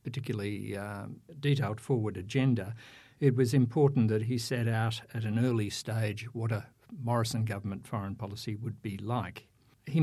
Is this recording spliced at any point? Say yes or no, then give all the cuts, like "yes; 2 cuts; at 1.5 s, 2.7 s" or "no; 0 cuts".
no; 0 cuts